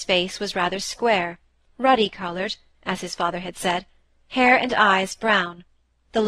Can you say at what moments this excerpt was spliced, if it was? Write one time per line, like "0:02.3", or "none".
none